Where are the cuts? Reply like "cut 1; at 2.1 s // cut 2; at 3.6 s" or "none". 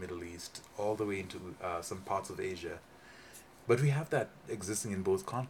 cut 1; at 3.6 s